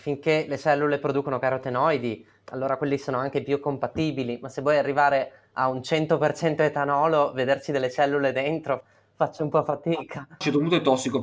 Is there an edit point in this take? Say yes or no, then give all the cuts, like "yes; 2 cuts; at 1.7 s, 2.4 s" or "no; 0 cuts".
no; 0 cuts